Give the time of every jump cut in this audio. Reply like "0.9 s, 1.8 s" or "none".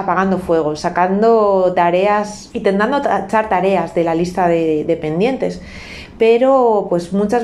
2.5 s

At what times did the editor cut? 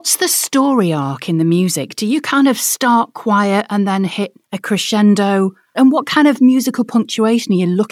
4.4 s

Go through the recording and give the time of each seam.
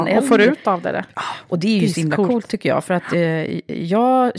1.1 s

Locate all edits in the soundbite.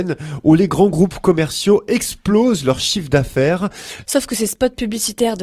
4.0 s

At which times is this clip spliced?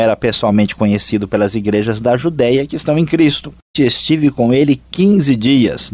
3.7 s

